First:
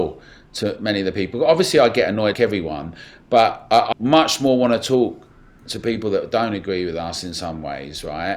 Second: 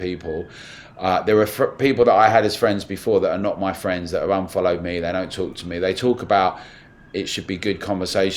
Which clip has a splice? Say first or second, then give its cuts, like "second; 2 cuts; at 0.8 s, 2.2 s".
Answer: first; 2 cuts; at 2.3 s, 3.9 s